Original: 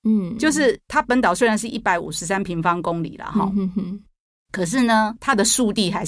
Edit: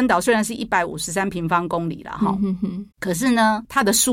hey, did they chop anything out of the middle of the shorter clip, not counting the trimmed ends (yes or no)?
yes